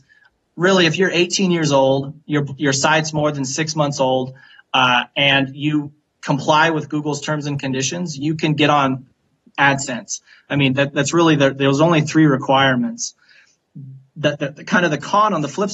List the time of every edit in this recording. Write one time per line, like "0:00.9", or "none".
none

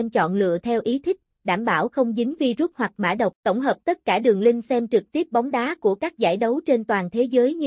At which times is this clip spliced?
0:03.4

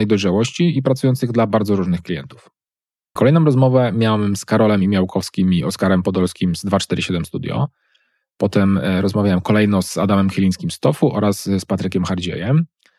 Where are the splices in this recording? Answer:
0:03.2

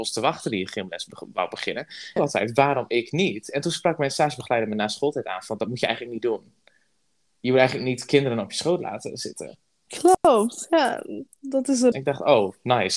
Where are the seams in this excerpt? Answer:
0:02.2
0:09.9
0:11.9

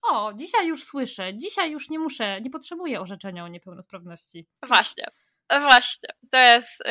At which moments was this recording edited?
0:04.6

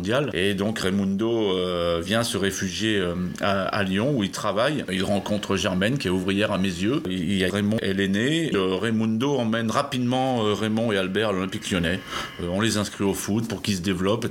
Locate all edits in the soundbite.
0:07.5
0:08.5

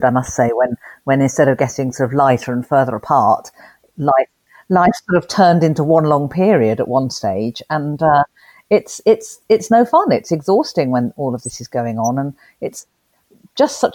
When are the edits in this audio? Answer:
none

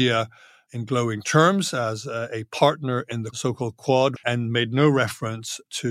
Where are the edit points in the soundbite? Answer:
0:04.2

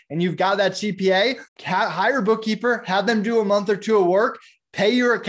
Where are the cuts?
0:01.5

